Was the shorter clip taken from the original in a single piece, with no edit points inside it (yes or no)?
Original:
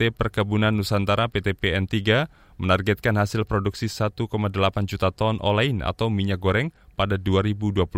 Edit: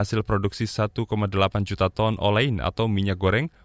yes